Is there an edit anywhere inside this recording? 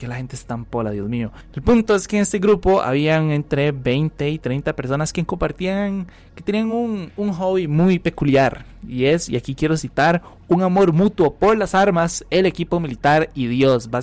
no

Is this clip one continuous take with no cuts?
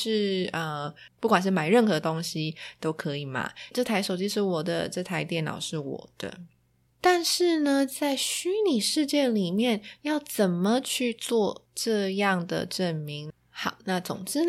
no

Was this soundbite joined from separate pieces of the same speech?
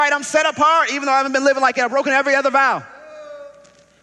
no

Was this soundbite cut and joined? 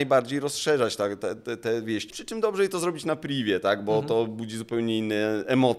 yes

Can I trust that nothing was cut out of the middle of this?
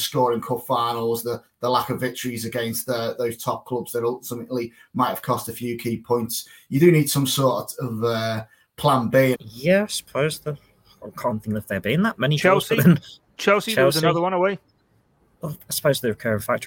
no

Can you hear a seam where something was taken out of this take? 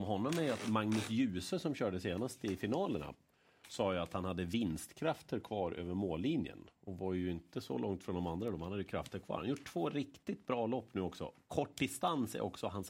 no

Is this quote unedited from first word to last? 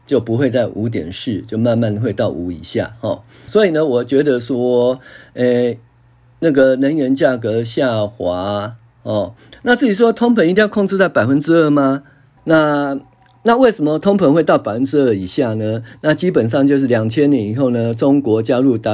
no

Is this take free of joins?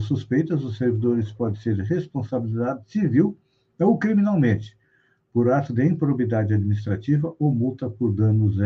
yes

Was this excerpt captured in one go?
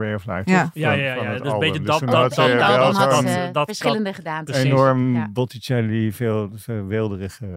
yes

